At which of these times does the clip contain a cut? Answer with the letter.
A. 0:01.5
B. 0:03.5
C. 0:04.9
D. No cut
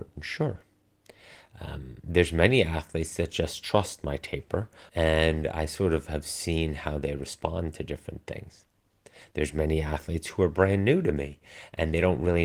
C